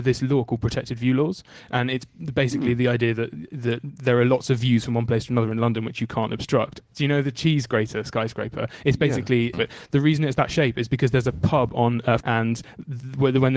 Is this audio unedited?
no; 2 cuts; at 9.5 s, 12.2 s

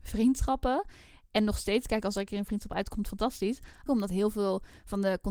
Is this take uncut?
no; 1 cut; at 3.9 s

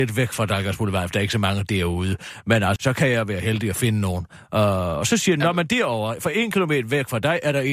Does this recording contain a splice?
yes; 1 cut; at 2.8 s

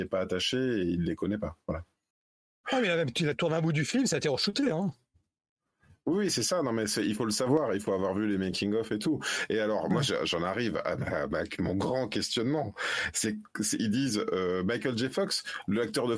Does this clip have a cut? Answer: yes; 1 cut; at 2.6 s

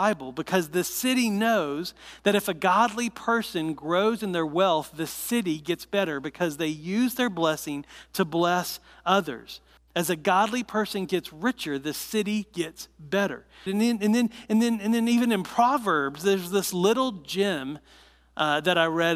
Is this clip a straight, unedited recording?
no; 1 cut; at 13.7 s

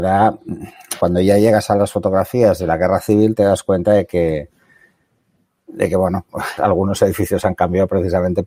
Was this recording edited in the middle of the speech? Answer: yes; 2 cuts; at 1.0 s, 6.6 s

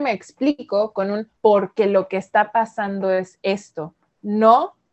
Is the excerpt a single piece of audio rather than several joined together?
no; 1 cut; at 1.4 s

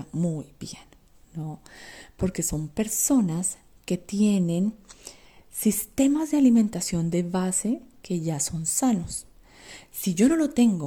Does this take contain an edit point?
yes; 1 cut; at 9.8 s

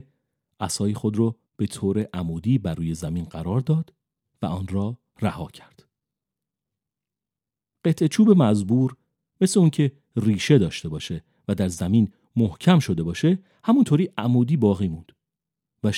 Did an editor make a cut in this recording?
yes; 1 cut; at 1.5 s

